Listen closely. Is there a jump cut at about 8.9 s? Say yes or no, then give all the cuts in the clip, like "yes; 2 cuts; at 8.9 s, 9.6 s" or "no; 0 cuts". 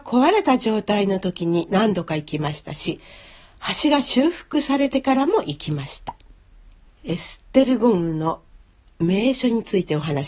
no; 1 cut; at 6.9 s